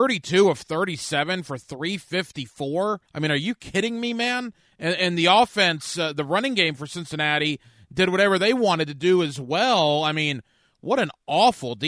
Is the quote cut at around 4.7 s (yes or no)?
no